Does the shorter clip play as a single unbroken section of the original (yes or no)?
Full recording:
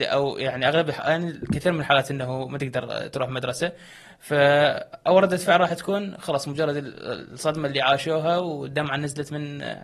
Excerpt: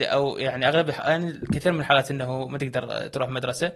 yes